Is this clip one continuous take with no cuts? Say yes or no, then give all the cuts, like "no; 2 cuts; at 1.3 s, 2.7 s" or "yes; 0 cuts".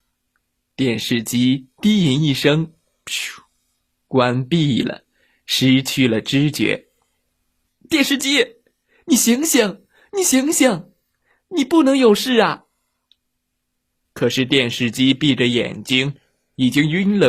no; 2 cuts; at 7.7 s, 14.1 s